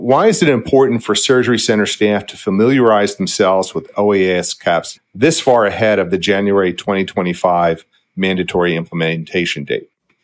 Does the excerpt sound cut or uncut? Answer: cut